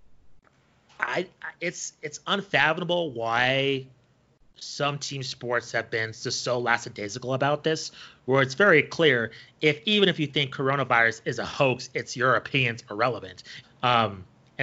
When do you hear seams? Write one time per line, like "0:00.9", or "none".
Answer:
0:13.6